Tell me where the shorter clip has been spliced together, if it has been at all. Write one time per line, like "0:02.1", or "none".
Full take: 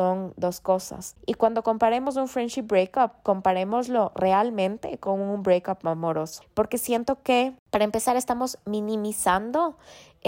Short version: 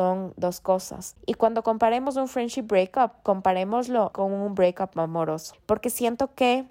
0:04.1